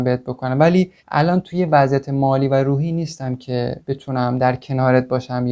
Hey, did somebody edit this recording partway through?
yes; 2 cuts; at 1.0 s, 3.8 s

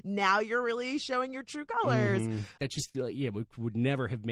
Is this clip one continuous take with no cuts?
no; 1 cut; at 2.6 s

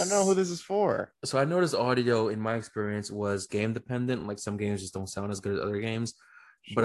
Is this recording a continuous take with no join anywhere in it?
yes; 0 cuts

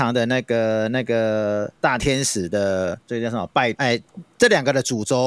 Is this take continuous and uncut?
no; 1 cut; at 3.7 s

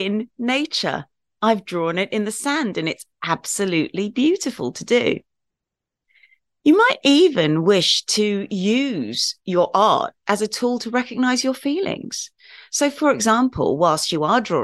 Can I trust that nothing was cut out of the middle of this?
yes; 0 cuts

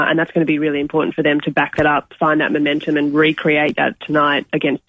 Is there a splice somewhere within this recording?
no; 0 cuts

